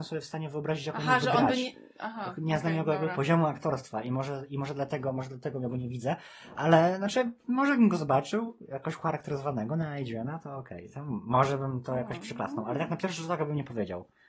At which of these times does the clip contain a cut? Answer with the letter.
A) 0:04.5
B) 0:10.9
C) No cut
C